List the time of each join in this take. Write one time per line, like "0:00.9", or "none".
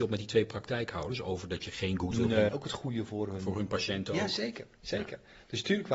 0:02.5